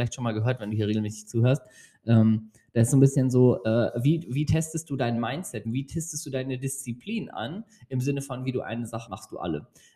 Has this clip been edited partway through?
yes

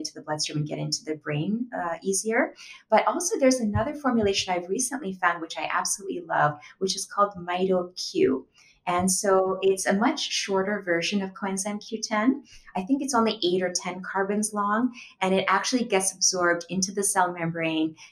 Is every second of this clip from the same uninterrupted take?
yes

